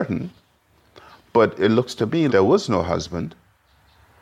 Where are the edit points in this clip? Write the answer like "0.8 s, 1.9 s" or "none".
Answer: 2.3 s